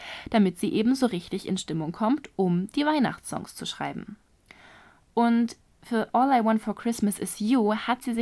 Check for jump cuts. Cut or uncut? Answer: uncut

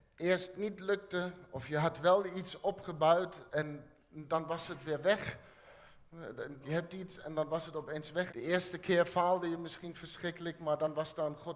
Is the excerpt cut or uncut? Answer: cut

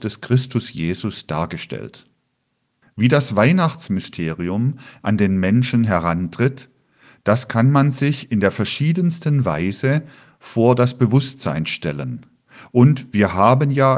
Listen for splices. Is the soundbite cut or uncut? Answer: cut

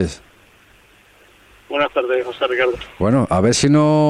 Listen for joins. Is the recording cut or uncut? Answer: uncut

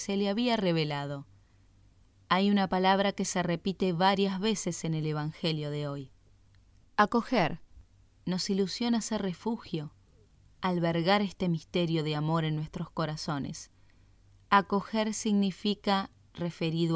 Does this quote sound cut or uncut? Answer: cut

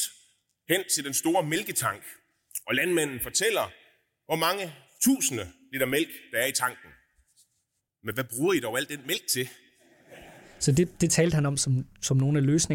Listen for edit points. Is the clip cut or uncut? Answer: cut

